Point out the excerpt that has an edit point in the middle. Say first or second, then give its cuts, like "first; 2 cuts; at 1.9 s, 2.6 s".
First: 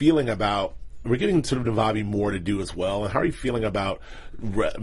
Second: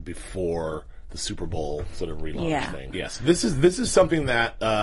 second; 1 cut; at 2.9 s